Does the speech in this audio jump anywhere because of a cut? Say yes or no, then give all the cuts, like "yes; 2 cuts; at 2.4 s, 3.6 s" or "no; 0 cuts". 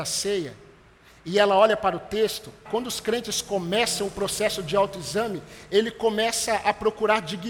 yes; 1 cut; at 2.7 s